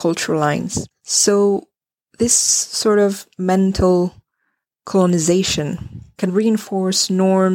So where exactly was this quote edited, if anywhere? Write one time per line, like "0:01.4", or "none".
0:00.9
0:06.3